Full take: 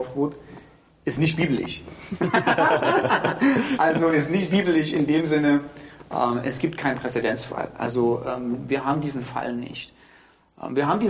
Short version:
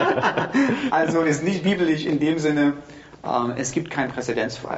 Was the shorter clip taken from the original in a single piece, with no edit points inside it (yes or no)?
yes